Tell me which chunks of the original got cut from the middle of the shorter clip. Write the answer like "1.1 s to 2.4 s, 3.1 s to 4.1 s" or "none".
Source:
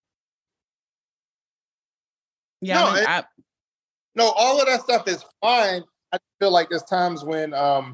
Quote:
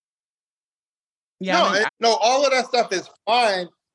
3.1 s to 4.0 s